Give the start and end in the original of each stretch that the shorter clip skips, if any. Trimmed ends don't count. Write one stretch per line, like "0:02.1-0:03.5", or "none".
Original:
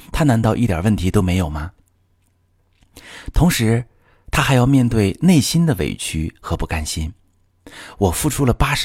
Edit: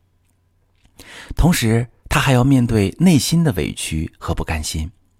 0:04.0-0:04.2